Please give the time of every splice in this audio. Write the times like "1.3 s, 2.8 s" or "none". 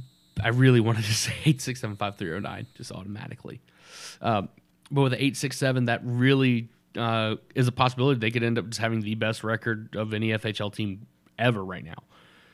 none